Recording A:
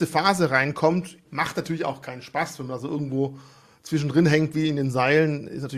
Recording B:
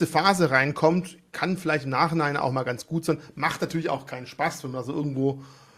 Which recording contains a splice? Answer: A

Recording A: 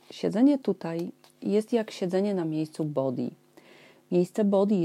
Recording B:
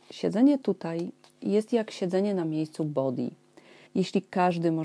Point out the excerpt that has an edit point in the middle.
B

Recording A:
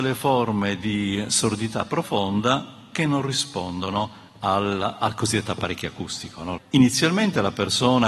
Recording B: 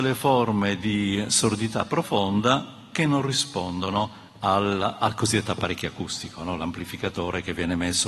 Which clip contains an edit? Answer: A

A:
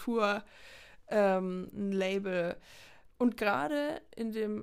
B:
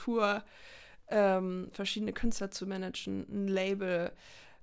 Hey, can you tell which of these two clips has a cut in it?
A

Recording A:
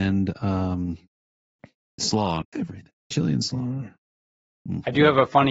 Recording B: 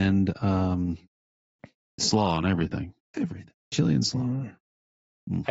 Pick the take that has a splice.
A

